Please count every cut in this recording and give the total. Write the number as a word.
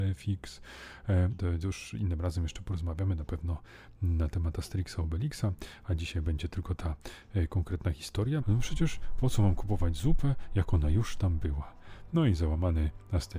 two